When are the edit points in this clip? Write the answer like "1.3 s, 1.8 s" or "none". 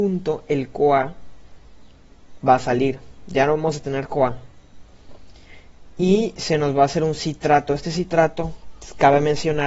none